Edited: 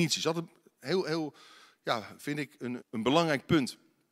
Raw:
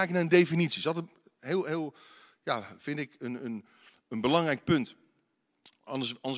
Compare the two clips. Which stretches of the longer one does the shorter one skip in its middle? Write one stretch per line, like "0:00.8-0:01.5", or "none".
0:03.4-0:04.0